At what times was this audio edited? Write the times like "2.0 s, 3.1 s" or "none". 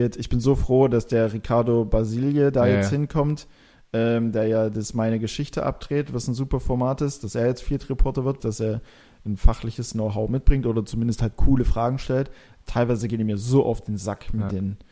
8.4 s